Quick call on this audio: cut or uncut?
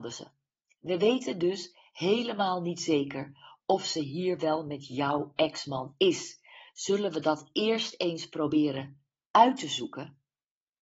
uncut